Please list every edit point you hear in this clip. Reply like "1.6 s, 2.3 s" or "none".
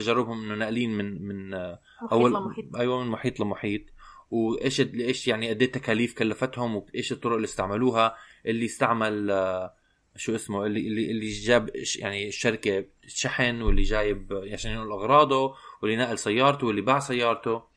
none

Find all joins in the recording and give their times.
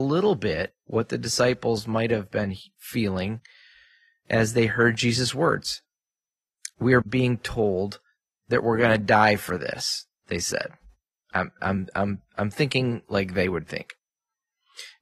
7.0 s

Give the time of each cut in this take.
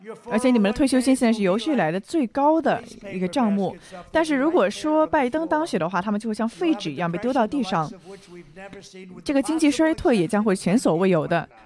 none

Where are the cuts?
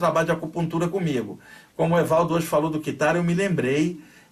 1.7 s

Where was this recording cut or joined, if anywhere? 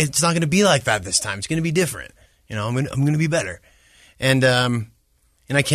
none

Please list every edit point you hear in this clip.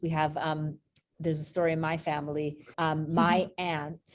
2.7 s

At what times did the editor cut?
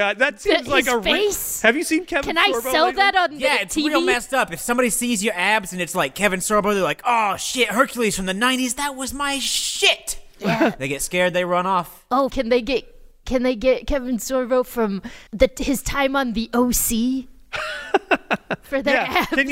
12.3 s, 15.3 s

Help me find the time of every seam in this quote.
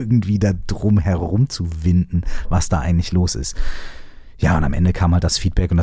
none

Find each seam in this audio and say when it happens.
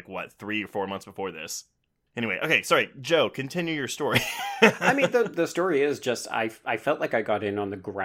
none

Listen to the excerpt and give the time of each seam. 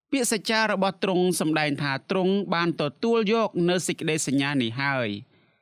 none

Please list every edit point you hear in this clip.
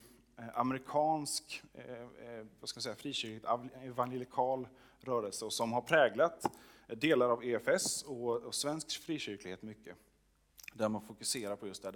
2.6 s

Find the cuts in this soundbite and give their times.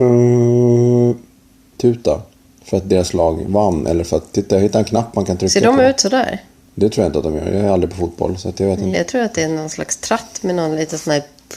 8.9 s

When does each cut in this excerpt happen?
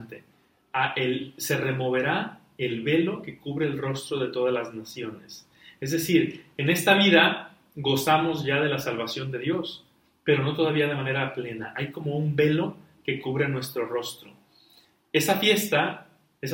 none

